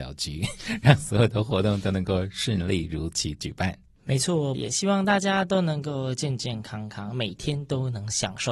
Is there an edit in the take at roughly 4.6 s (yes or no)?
yes